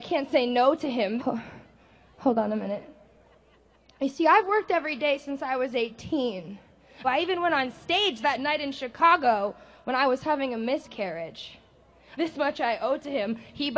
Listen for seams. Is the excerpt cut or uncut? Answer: cut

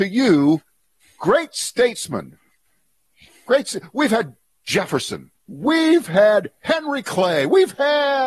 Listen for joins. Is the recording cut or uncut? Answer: cut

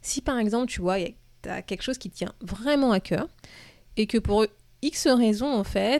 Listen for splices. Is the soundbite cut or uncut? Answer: uncut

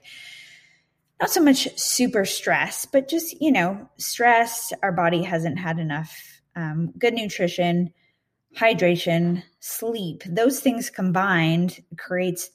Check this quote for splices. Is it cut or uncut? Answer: uncut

